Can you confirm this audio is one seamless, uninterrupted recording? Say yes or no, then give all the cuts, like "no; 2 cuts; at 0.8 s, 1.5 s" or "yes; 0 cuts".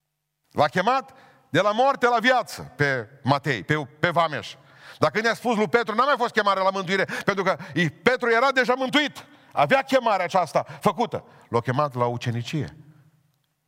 yes; 0 cuts